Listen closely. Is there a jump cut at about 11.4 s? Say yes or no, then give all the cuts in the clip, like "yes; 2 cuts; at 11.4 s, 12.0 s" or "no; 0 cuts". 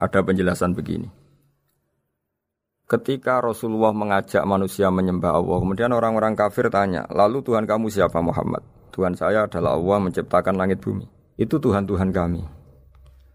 yes; 1 cut; at 11.4 s